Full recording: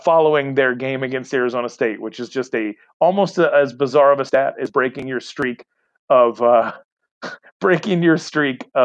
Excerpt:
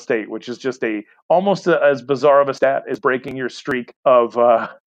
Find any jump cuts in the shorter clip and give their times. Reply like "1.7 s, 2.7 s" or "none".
4.0 s

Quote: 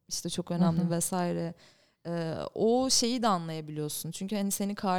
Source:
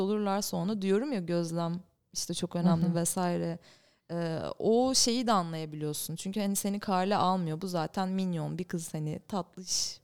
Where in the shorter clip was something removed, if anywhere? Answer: none

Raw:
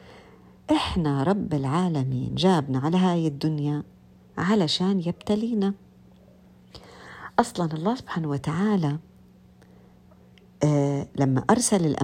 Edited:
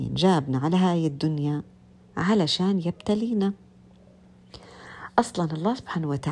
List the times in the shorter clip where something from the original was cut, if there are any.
none

